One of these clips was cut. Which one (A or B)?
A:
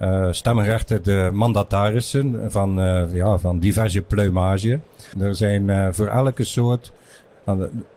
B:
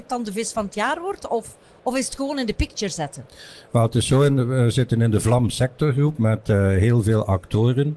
A